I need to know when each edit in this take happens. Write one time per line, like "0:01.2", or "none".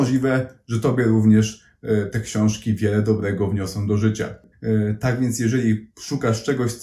0:04.5